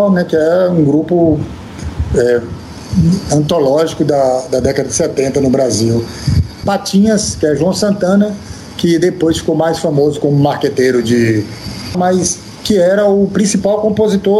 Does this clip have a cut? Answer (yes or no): yes